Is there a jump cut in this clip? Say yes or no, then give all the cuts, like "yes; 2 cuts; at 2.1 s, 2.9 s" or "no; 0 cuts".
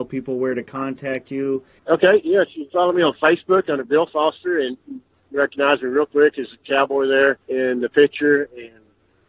yes; 2 cuts; at 1.8 s, 7.4 s